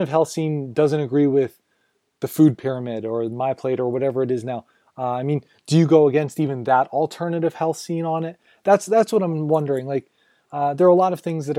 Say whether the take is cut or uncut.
uncut